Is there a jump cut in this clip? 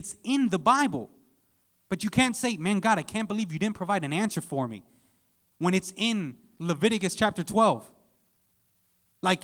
no; 0 cuts

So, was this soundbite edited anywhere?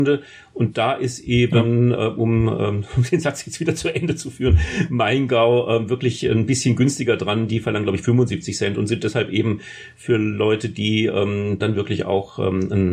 yes; 1 cut; at 11.6 s

